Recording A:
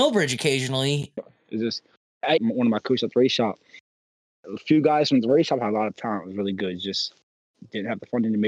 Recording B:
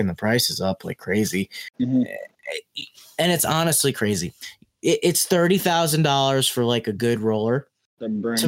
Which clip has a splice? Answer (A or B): A